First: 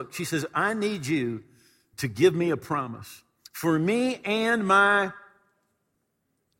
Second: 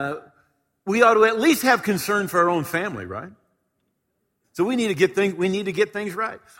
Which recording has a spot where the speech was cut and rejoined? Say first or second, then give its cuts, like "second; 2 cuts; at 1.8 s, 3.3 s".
second; 1 cut; at 4.4 s